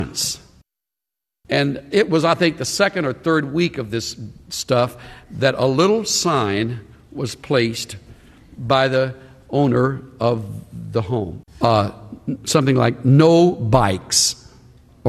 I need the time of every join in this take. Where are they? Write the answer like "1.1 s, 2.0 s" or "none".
1.4 s, 11.4 s